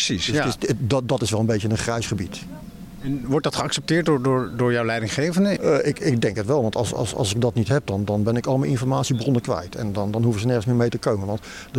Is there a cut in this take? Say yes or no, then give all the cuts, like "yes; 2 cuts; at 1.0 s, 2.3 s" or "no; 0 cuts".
yes; 1 cut; at 5.6 s